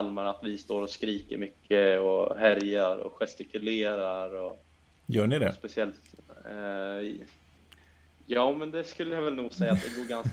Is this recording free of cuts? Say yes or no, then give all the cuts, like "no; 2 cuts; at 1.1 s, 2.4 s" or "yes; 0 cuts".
yes; 0 cuts